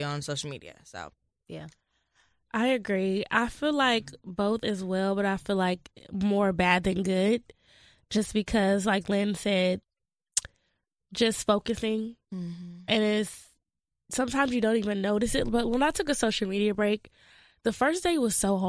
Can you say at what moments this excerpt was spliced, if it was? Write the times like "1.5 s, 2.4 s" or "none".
9.8 s